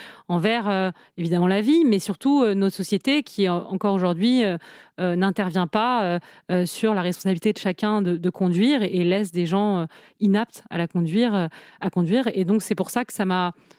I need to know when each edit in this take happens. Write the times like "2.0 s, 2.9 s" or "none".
none